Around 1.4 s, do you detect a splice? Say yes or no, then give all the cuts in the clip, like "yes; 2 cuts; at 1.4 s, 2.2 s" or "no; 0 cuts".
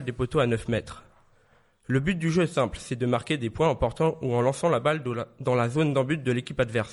no; 0 cuts